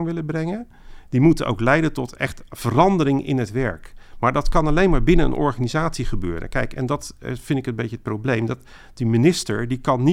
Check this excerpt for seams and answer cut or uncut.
uncut